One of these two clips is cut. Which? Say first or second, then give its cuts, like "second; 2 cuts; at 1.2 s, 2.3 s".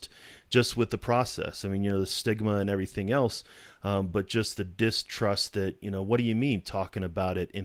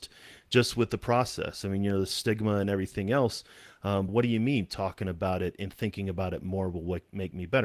second; 1 cut; at 4.1 s